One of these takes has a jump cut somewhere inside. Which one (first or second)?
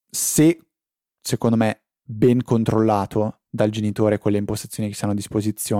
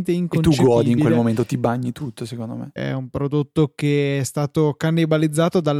second